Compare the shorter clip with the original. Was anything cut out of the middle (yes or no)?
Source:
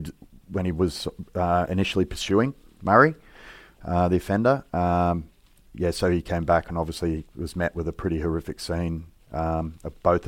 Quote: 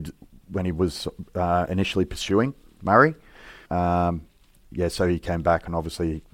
yes